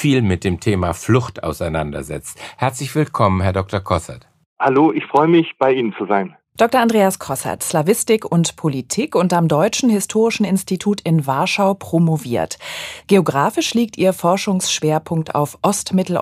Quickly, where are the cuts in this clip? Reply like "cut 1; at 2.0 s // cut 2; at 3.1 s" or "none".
cut 1; at 7.6 s // cut 2; at 13.0 s